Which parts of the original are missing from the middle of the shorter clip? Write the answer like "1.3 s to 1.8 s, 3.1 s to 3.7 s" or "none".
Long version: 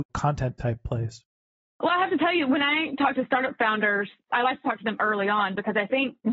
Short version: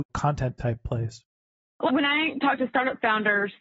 1.9 s to 2.5 s